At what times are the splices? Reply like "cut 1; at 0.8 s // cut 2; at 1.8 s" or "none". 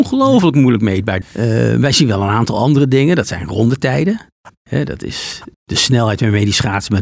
cut 1; at 1.2 s // cut 2; at 5.5 s